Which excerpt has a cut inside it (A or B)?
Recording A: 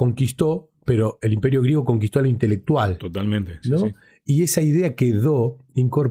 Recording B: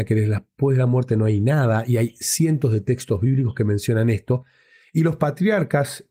A